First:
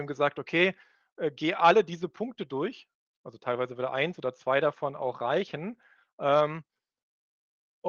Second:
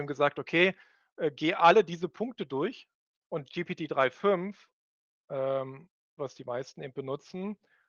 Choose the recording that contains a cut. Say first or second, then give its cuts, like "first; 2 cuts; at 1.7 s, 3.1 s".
second; 2 cuts; at 3.2 s, 6.2 s